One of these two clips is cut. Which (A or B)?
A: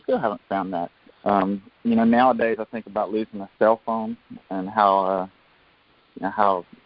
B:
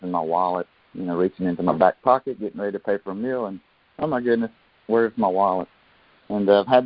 A